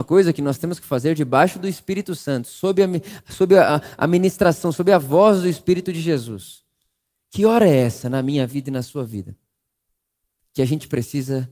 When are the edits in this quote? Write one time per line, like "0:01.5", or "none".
none